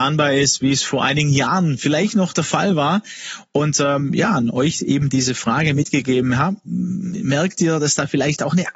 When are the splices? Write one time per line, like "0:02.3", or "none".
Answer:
none